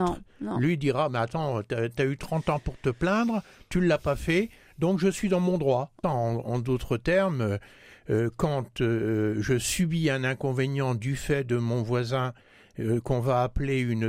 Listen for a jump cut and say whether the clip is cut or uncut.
cut